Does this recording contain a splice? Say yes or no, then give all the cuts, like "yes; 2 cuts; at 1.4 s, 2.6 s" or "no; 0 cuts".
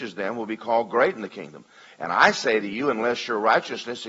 no; 0 cuts